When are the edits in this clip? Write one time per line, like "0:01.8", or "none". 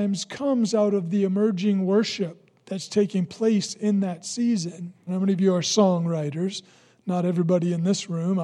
0:05.1